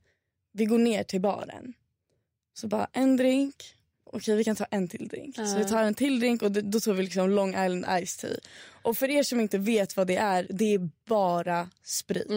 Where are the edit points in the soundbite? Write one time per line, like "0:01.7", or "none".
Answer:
0:04.1